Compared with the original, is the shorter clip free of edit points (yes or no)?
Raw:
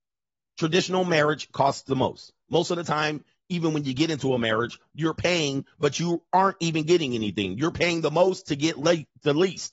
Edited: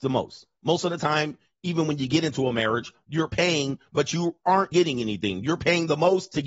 no